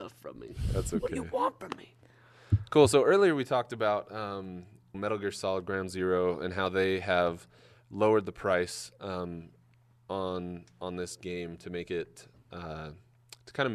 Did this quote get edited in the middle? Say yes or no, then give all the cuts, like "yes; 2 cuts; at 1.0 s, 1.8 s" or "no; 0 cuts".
yes; 1 cut; at 4.9 s